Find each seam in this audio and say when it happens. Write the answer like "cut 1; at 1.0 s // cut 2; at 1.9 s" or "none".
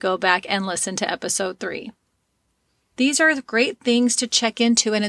cut 1; at 2.9 s